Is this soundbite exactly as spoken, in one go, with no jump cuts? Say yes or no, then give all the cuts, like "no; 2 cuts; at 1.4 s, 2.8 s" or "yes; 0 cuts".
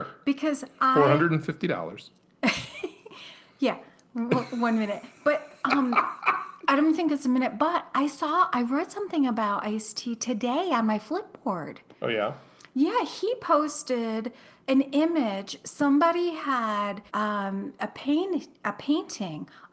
no; 1 cut; at 17.1 s